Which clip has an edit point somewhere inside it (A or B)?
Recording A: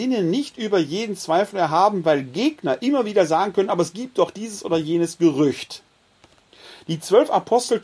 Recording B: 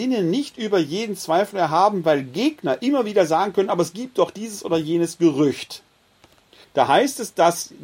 B